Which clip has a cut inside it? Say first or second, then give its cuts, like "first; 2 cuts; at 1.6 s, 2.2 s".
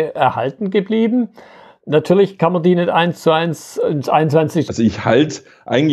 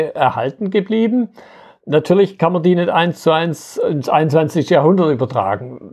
first; 1 cut; at 4.7 s